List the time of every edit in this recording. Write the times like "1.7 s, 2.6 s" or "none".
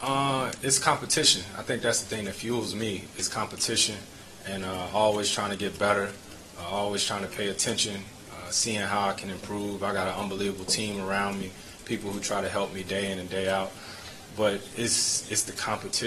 none